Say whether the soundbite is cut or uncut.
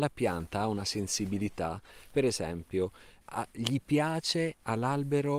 cut